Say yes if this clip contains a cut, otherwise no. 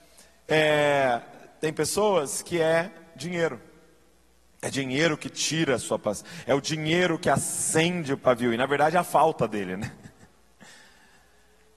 no